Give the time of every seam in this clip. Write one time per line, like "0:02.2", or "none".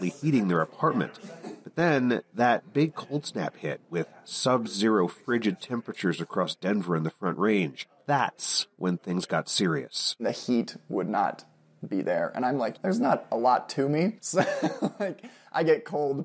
0:12.8
0:14.2

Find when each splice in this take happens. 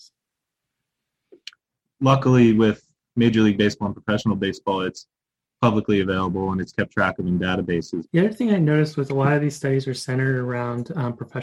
0:01.8
0:08.1

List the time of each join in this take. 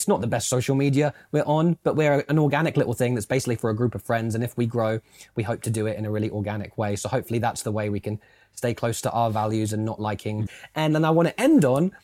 0:10.5

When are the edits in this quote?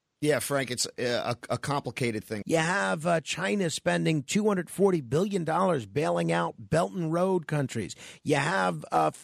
0:02.4

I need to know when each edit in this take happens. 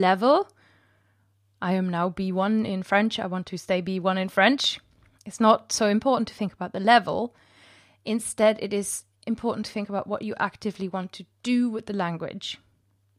none

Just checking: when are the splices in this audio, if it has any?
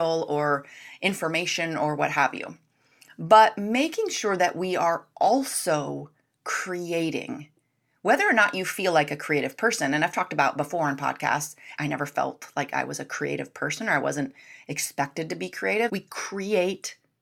0:11.8
0:15.9

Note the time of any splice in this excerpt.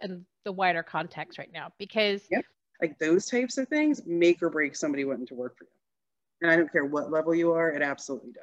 0:02.7

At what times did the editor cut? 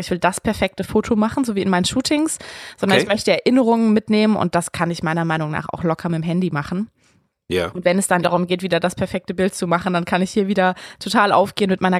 0:08.2

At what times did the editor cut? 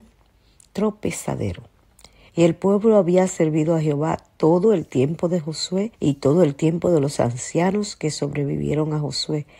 0:02.3
0:05.9

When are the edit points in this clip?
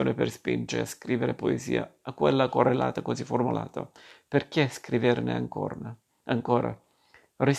none

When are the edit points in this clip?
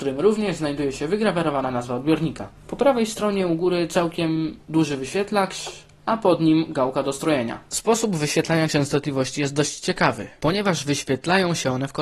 none

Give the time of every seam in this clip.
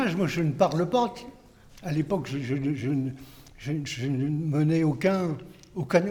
none

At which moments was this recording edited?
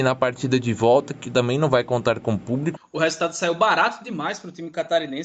0:02.8

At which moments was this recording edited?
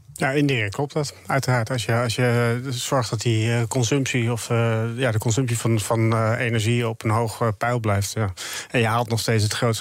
none

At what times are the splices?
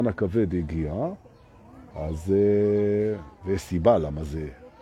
0:01.9

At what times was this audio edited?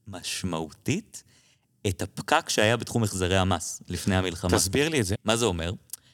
0:05.2

